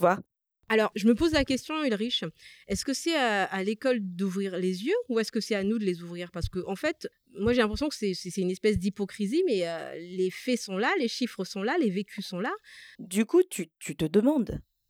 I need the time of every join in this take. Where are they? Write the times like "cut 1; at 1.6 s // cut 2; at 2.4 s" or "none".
cut 1; at 12.9 s

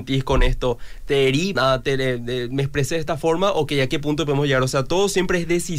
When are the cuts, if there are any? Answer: cut 1; at 1.6 s

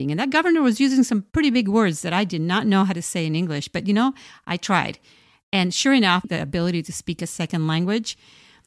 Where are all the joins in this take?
cut 1; at 6.2 s

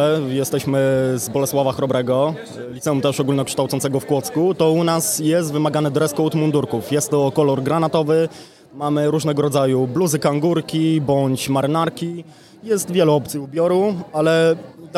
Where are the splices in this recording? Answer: none

